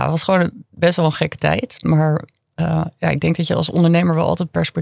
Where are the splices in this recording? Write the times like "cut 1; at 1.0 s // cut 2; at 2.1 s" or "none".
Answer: none

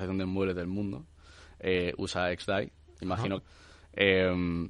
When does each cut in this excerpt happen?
cut 1; at 3.4 s

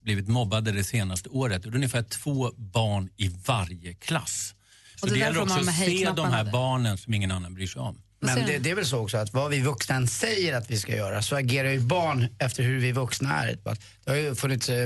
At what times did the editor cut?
cut 1; at 4.9 s // cut 2; at 13.7 s

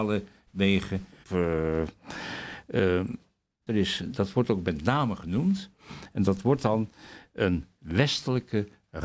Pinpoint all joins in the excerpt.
cut 1; at 1.2 s // cut 2; at 3.7 s

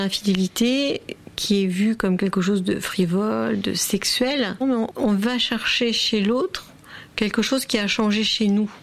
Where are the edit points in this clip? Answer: cut 1; at 4.6 s

